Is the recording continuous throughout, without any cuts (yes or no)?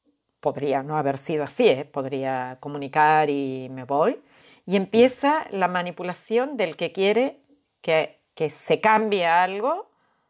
yes